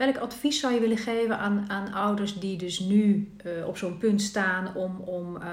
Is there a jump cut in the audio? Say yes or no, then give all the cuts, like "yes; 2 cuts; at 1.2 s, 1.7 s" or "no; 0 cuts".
no; 0 cuts